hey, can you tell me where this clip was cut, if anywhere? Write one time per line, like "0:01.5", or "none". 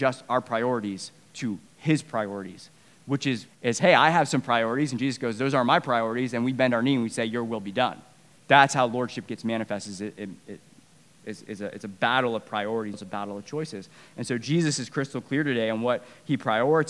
0:03.5
0:12.9